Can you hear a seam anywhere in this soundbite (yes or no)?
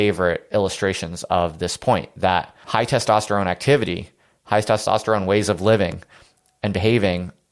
no